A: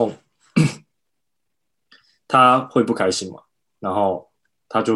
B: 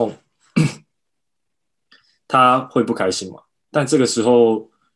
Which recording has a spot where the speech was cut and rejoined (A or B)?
B